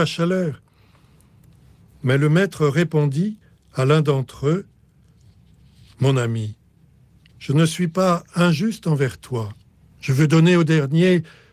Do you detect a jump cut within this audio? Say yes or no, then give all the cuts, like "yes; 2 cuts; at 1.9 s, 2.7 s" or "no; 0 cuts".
yes; 1 cut; at 9.9 s